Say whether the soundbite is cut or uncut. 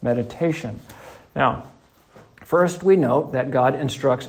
uncut